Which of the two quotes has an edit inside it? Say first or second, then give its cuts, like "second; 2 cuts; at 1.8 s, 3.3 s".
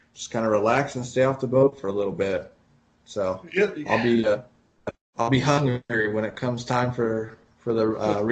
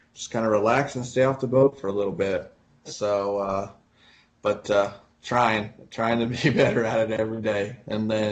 second; 1 cut; at 2.8 s